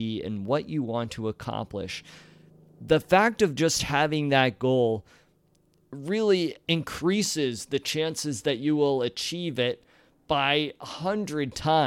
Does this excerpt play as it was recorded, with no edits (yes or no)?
yes